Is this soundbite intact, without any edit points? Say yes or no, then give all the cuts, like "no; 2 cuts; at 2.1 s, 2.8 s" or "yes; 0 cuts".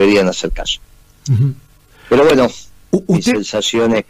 no; 1 cut; at 2.9 s